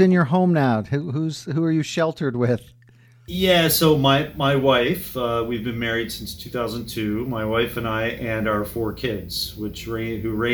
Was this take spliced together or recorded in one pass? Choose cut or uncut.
uncut